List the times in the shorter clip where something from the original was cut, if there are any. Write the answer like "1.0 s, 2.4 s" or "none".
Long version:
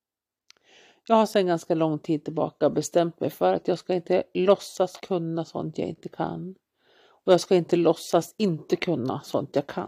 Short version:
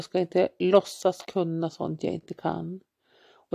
none